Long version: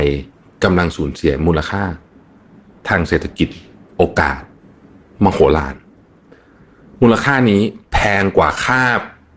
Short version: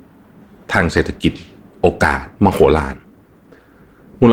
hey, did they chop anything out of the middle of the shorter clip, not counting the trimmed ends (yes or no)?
yes